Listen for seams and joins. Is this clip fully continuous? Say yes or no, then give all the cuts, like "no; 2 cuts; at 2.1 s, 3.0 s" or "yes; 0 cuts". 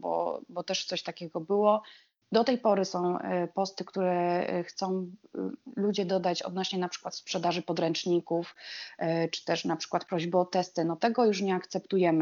yes; 0 cuts